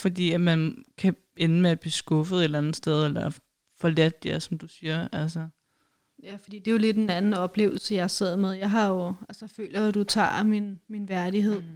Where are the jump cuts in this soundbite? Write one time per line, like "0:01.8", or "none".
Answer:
none